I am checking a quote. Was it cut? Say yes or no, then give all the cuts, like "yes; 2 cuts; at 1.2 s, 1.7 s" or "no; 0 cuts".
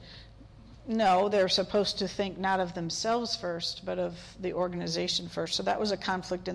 no; 0 cuts